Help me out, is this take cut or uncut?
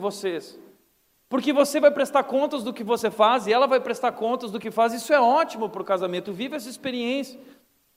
uncut